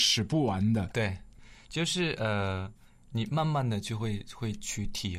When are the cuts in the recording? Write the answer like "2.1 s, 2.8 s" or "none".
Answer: 0.9 s